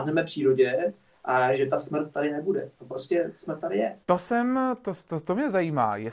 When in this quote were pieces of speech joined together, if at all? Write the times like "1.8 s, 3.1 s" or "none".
4.0 s